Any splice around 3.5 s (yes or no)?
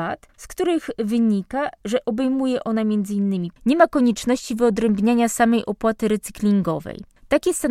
yes